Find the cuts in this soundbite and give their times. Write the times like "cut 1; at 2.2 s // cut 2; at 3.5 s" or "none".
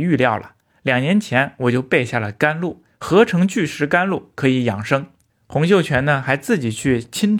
none

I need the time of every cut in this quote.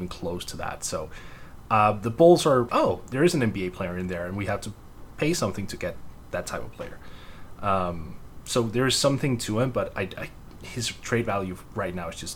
cut 1; at 2.7 s

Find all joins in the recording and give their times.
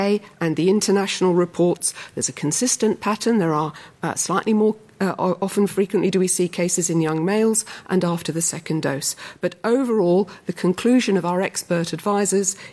none

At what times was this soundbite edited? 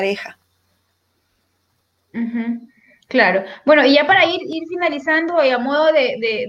none

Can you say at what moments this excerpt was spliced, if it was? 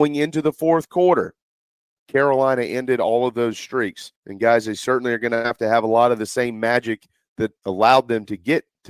cut 1; at 1.9 s // cut 2; at 4.2 s

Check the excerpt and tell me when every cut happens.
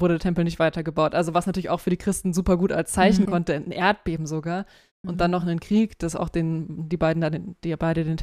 cut 1; at 3.3 s

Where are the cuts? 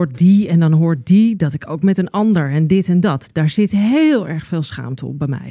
none

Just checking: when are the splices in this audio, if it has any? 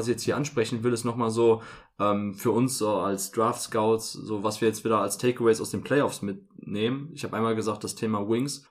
none

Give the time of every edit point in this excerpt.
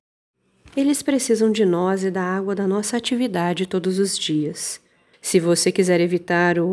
cut 1; at 5.1 s

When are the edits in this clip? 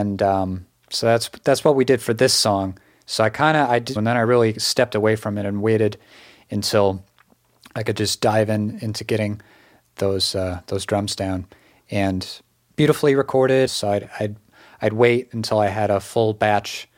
cut 1; at 4.0 s // cut 2; at 13.7 s

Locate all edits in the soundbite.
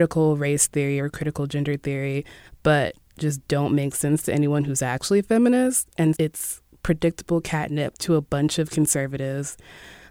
cut 1; at 6.1 s

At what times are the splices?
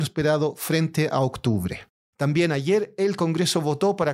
cut 1; at 2.1 s

